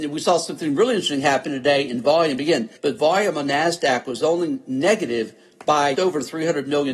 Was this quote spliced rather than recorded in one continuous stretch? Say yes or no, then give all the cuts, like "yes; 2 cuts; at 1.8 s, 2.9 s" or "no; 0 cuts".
yes; 2 cuts; at 2.8 s, 5.9 s